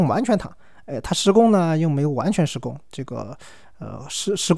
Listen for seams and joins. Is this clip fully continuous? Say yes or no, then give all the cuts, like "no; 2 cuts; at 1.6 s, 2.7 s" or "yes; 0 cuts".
yes; 0 cuts